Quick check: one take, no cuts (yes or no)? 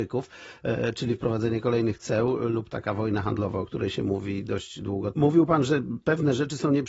no